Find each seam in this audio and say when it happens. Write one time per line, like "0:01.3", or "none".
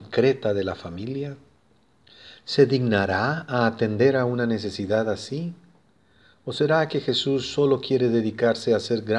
none